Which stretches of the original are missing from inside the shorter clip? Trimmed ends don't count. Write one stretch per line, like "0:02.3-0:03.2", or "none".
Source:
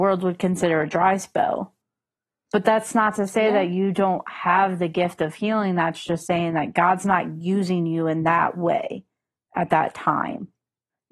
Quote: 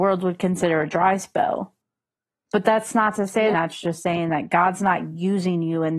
0:03.5-0:05.8